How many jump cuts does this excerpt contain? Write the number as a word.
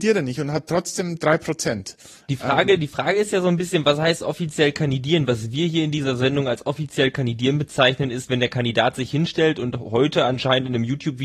zero